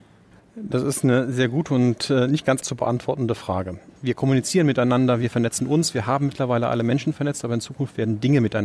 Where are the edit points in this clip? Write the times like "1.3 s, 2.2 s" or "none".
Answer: 2.6 s, 3.9 s